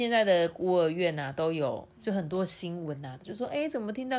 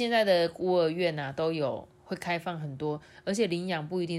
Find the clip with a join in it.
first; 2 cuts; at 1.9 s, 3.2 s

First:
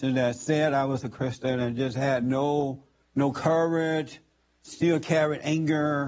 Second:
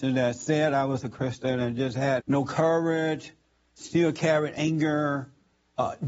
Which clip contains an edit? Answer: second; 1 cut; at 2.2 s

